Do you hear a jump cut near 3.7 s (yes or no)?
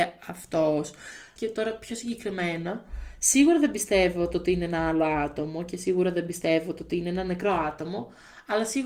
no